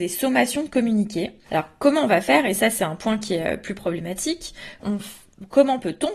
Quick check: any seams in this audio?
yes; 2 cuts; at 1.5 s, 4.8 s

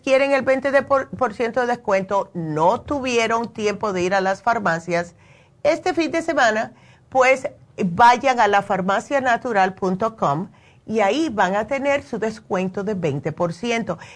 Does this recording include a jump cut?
no; 0 cuts

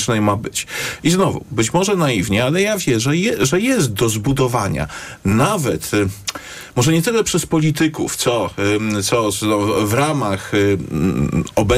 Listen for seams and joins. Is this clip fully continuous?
yes; 0 cuts

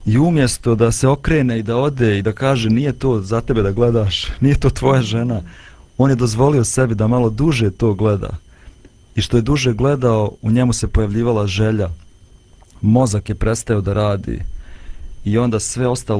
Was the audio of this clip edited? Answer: no; 0 cuts

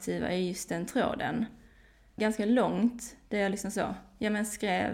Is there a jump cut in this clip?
yes; 1 cut; at 2.2 s

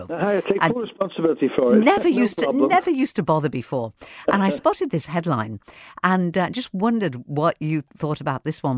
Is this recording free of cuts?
yes; 0 cuts

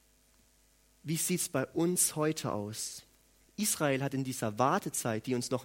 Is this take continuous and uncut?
no; 1 cut; at 3.4 s

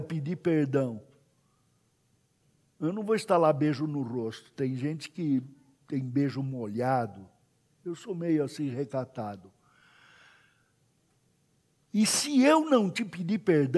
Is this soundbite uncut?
yes; 0 cuts

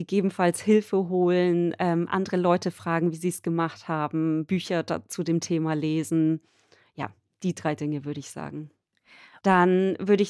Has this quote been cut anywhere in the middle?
yes; 1 cut; at 9.4 s

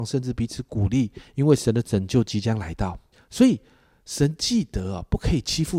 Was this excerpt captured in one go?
no; 1 cut; at 3.1 s

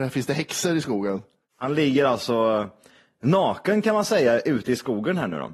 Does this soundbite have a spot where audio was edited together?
no; 0 cuts

